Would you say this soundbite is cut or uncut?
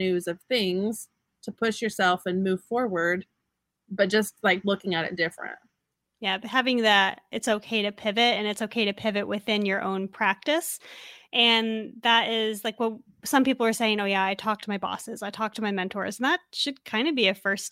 uncut